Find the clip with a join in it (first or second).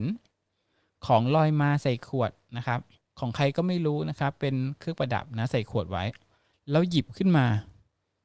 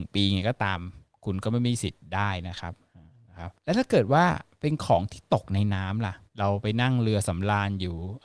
second